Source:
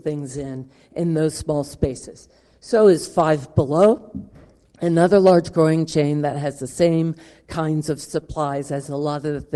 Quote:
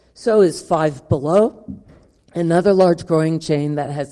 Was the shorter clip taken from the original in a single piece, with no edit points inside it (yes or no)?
yes